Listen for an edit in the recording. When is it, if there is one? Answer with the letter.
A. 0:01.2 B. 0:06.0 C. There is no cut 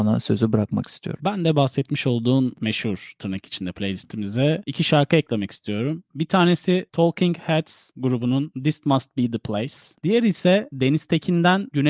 C